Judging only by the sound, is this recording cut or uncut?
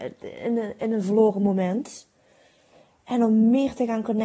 uncut